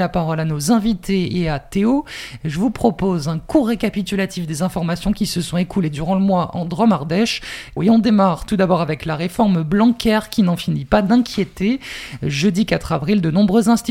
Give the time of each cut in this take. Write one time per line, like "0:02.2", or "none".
0:07.8